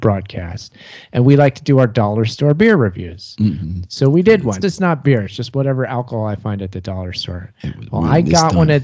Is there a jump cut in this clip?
yes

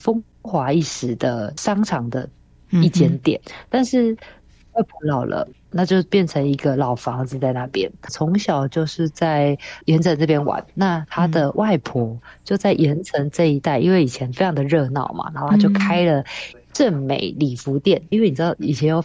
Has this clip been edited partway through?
yes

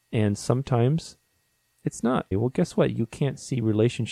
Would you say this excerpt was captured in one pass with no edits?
no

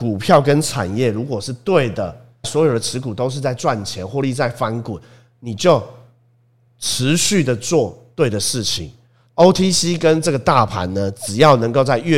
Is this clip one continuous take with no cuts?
no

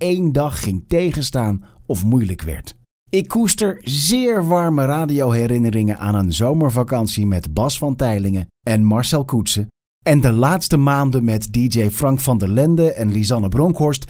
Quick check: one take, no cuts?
no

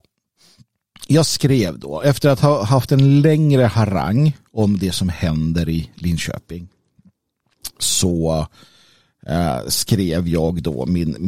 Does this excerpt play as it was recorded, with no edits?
yes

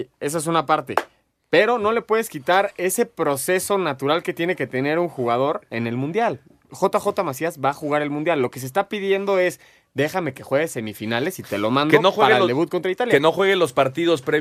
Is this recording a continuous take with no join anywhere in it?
yes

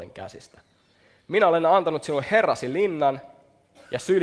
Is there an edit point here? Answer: no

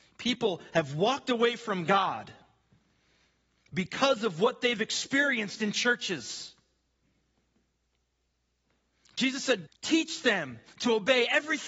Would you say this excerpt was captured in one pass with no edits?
no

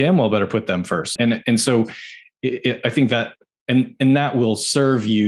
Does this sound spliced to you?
yes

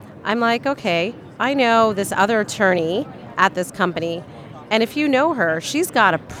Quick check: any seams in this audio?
no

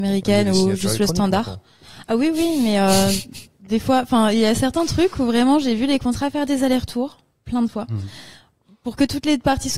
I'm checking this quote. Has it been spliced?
no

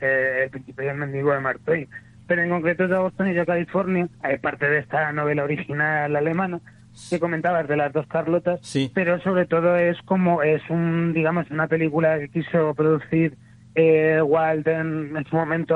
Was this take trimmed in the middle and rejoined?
yes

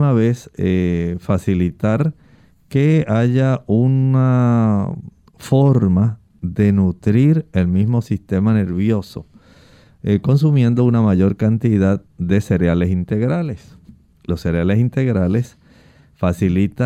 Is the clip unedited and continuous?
yes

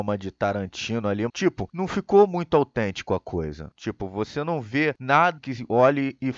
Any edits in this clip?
yes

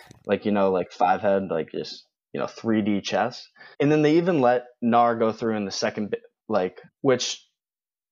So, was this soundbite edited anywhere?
yes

